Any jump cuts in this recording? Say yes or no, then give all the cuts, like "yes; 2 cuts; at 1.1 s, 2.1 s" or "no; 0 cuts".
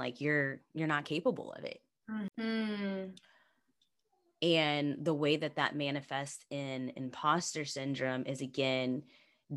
yes; 1 cut; at 2.3 s